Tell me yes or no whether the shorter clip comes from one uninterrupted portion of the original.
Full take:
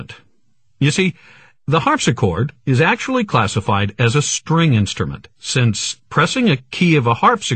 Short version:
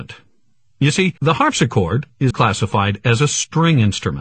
no